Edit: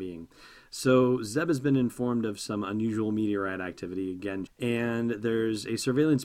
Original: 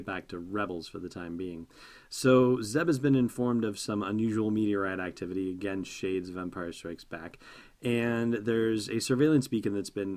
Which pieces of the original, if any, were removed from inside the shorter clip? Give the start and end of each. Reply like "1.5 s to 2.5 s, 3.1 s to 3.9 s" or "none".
5.8 s to 7.7 s

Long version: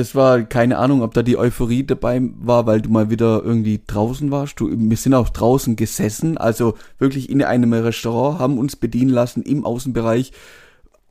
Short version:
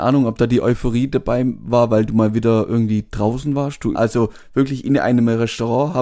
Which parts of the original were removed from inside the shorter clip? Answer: 4.7 s to 6.4 s

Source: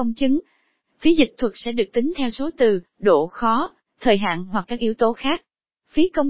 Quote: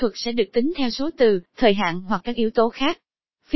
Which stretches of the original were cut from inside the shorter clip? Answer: 2.9 s to 3.9 s

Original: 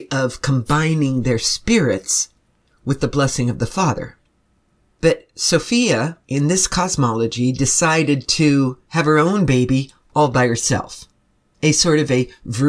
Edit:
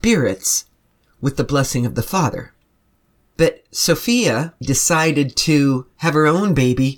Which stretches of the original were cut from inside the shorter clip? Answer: 6.2 s to 7.5 s

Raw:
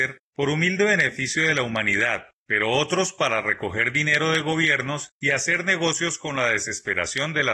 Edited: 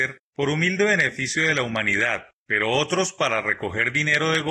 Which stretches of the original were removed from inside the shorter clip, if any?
none

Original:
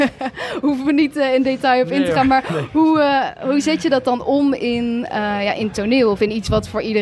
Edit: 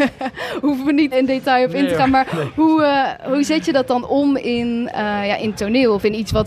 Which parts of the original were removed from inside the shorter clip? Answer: 1.1 s to 1.3 s

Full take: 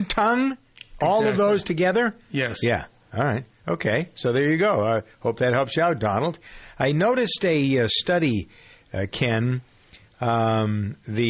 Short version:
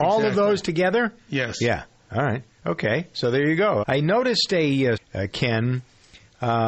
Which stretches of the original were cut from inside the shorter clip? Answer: 4.8 s to 6.7 s, 7.9 s to 8.8 s

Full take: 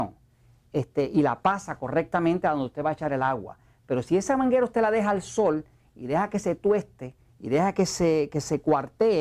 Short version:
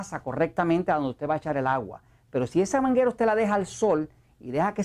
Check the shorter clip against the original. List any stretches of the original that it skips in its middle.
none

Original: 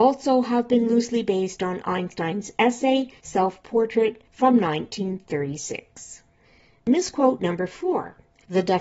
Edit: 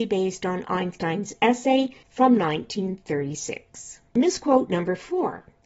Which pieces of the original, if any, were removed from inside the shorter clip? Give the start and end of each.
3.2 s to 4.3 s, 6.3 s to 6.8 s

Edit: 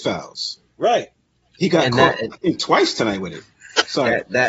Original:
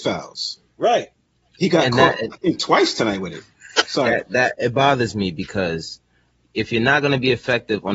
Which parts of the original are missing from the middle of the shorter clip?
none

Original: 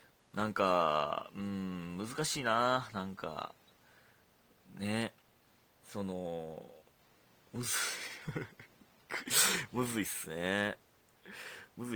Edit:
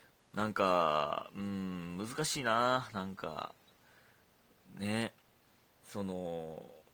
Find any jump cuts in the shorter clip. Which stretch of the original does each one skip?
none

